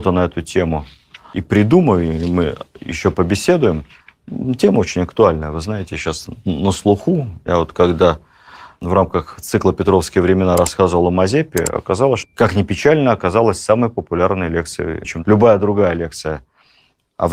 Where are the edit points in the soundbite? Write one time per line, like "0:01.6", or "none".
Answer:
0:12.2
0:15.0